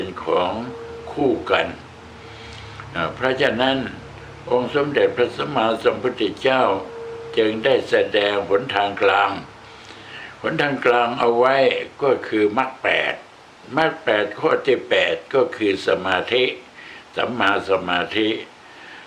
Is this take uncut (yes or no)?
yes